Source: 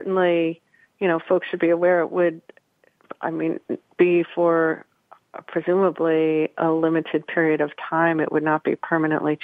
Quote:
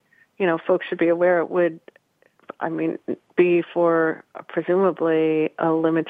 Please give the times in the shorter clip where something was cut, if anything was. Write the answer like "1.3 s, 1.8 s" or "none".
4.3 s